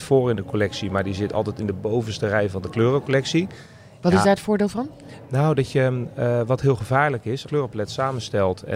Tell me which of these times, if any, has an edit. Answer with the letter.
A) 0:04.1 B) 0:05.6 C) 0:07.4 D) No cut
C